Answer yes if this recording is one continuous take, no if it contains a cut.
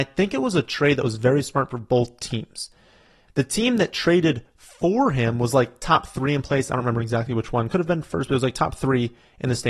yes